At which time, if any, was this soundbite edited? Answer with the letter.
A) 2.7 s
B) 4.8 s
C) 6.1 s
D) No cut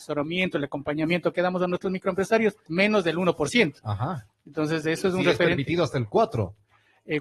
A